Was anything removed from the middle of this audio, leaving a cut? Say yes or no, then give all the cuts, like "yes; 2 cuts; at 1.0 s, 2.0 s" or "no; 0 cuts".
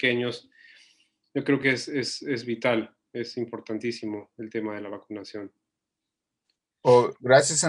no; 0 cuts